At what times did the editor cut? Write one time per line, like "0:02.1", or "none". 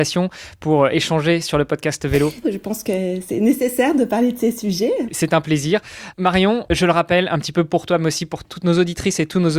0:02.4
0:05.0